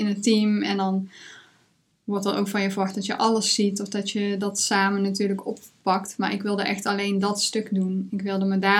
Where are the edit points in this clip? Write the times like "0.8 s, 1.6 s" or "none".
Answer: none